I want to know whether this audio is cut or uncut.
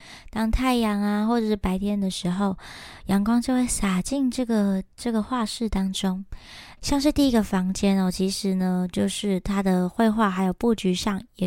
cut